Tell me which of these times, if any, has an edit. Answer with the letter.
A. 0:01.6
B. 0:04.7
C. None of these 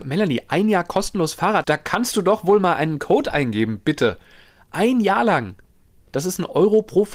A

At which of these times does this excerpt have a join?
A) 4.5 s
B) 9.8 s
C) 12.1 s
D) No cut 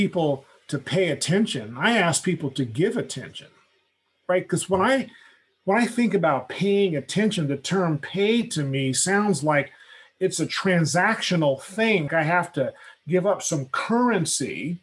C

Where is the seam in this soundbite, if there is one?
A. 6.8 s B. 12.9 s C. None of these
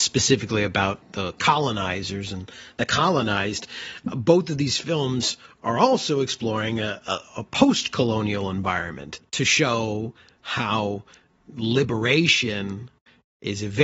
C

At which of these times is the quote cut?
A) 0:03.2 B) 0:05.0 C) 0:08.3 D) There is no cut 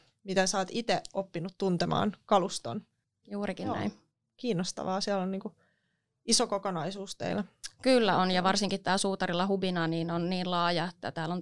A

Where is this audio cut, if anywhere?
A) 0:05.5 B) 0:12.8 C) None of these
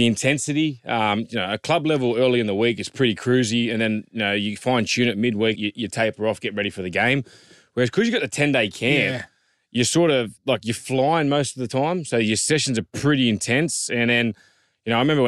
A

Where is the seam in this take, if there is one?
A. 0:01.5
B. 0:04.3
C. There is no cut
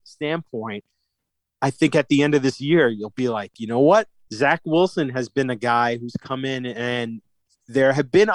B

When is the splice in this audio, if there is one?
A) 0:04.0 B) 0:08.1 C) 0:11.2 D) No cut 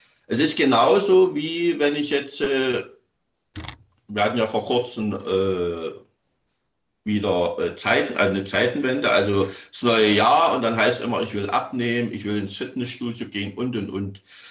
D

